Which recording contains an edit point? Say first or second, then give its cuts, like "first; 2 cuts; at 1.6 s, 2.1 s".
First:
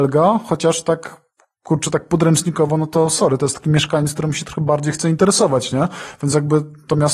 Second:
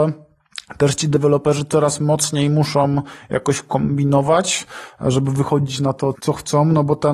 second; 1 cut; at 6.1 s